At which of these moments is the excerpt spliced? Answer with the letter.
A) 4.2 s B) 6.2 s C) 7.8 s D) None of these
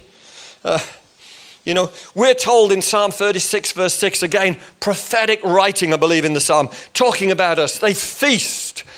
D